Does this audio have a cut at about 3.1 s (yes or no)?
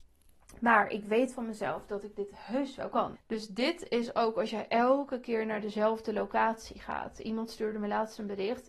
yes